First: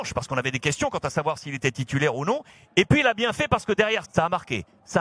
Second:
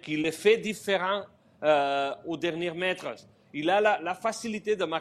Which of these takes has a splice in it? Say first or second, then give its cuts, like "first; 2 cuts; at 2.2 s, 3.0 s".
first; 1 cut; at 4.0 s